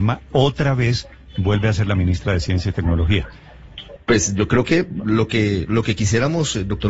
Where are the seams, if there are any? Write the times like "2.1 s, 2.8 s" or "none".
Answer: 4.0 s